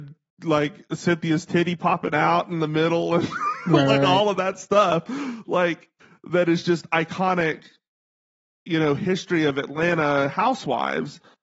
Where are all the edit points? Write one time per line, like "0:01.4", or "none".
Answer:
none